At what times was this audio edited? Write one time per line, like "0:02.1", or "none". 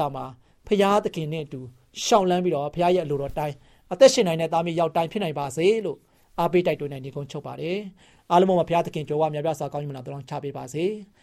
none